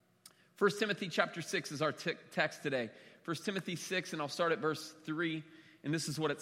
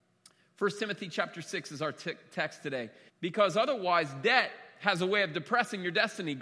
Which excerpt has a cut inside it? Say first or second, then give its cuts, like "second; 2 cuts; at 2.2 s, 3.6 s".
second; 1 cut; at 3.1 s